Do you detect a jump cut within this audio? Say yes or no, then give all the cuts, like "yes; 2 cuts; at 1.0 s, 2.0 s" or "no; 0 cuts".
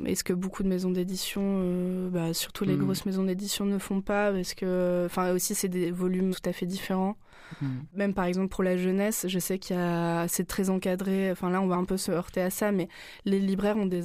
yes; 1 cut; at 6.3 s